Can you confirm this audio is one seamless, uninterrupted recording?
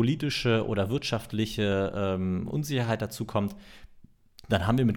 yes; 0 cuts

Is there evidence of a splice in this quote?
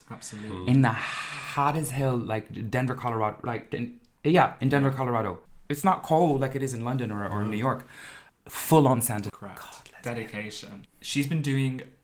yes; 2 cuts; at 9.3 s, 10.9 s

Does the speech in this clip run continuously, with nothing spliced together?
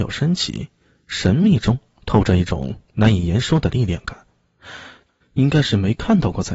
no; 1 cut; at 5.2 s

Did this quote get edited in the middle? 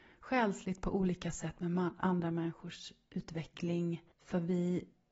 yes; 1 cut; at 4.1 s

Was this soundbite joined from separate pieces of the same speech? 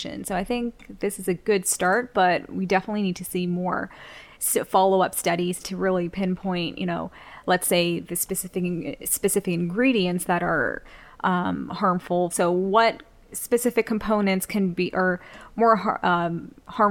yes; 2 cuts; at 5.6 s, 12.3 s

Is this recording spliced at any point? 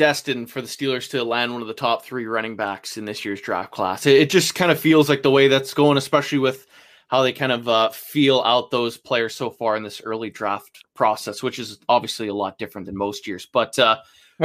no; 0 cuts

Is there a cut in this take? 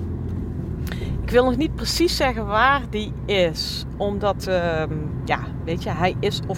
no; 0 cuts

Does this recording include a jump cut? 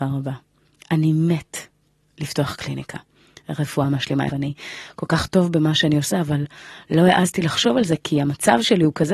yes; 1 cut; at 4.3 s

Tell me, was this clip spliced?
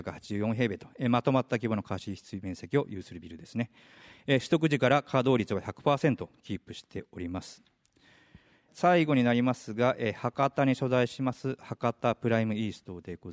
no; 0 cuts

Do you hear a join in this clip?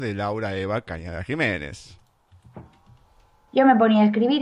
yes; 1 cut; at 3.5 s

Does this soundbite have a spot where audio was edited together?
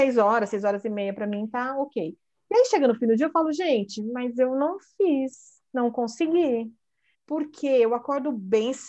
yes; 1 cut; at 7.1 s

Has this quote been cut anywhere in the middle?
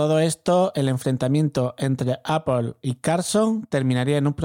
no; 0 cuts

